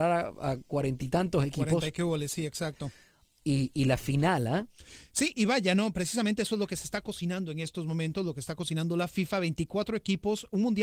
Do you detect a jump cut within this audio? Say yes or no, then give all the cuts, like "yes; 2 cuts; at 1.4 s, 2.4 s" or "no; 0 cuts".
yes; 2 cuts; at 3.4 s, 5.3 s